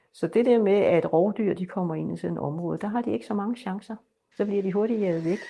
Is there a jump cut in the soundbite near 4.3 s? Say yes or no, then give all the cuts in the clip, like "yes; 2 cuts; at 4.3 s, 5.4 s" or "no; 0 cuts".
yes; 1 cut; at 4.3 s